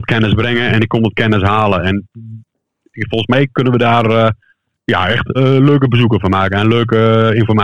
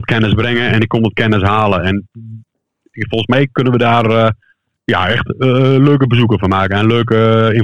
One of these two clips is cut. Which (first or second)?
first